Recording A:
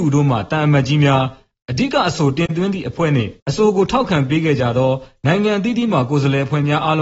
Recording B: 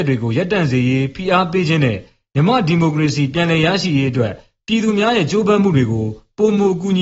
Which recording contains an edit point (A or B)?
A